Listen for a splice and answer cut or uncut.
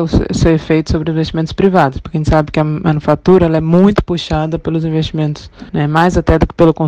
uncut